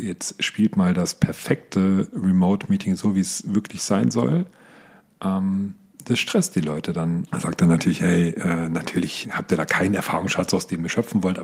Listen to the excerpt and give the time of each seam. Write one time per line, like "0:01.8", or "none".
0:07.3
0:09.2